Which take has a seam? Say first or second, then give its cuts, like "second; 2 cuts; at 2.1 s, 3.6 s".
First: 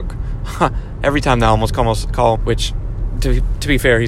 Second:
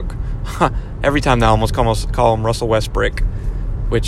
first; 1 cut; at 2.4 s